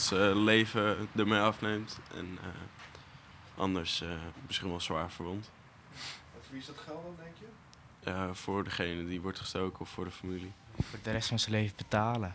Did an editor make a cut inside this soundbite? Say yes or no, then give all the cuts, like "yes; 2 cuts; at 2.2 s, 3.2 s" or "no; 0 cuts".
no; 0 cuts